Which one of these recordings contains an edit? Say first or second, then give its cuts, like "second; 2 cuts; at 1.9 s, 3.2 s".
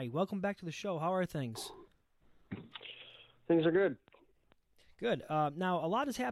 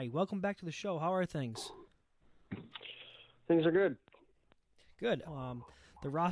second; 1 cut; at 5.2 s